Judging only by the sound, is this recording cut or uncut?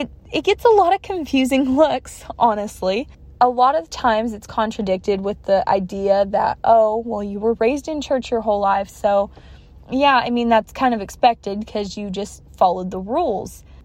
uncut